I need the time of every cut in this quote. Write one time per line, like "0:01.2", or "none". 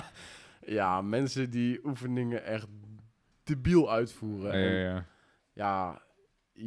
0:04.5